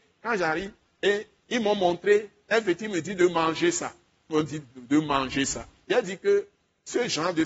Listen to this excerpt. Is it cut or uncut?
uncut